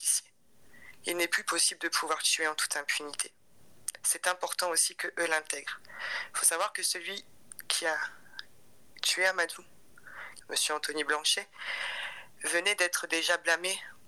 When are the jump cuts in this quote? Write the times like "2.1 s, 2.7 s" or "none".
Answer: 10.4 s